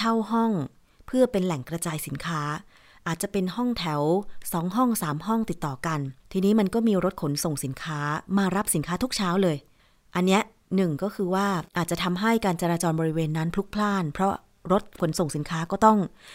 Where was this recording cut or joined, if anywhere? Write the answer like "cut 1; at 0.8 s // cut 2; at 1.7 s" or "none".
cut 1; at 6.2 s // cut 2; at 11.7 s